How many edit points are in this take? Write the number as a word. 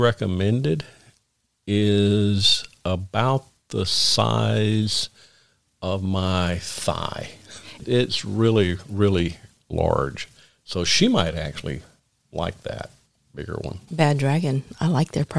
two